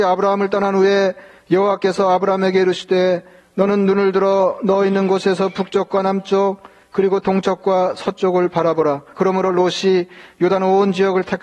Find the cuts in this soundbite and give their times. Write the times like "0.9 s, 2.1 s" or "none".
9.1 s

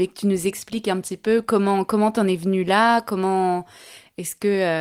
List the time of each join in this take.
none

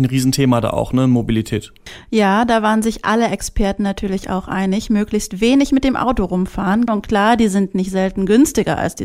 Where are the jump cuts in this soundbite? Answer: 6.9 s

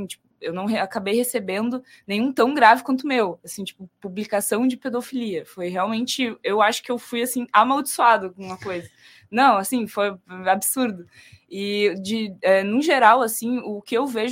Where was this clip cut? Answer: none

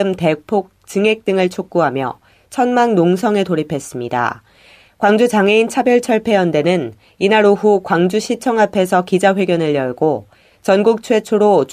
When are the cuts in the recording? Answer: none

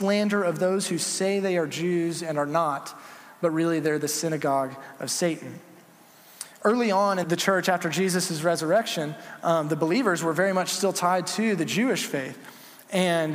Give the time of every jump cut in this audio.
7.2 s

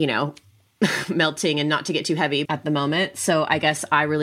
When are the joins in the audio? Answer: 2.4 s

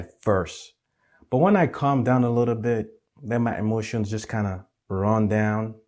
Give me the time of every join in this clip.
none

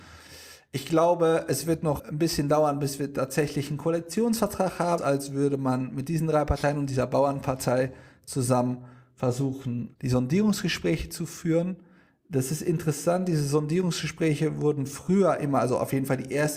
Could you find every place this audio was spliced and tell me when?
5.0 s

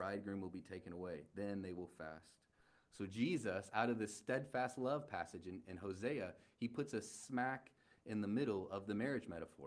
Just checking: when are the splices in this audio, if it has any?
none

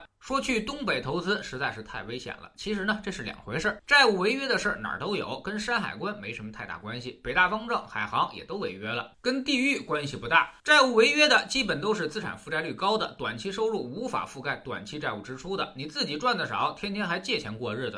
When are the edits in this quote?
none

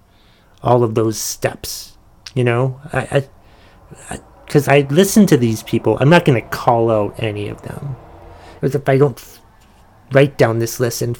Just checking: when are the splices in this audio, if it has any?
4.6 s, 8.6 s

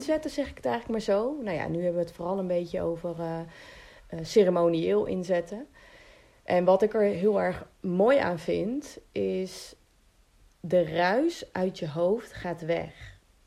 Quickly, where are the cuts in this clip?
none

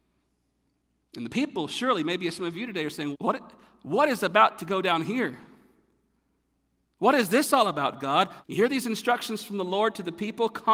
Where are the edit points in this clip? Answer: 3.1 s, 8.4 s

